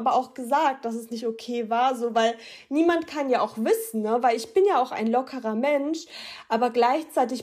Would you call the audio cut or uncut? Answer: uncut